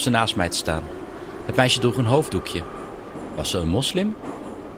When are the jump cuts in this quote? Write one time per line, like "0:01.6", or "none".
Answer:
none